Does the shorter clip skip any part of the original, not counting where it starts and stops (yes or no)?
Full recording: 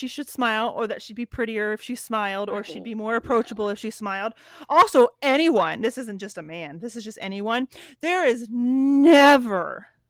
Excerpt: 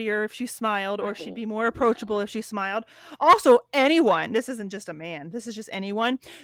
no